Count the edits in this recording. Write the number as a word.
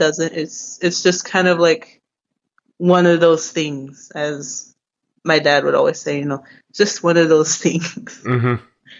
zero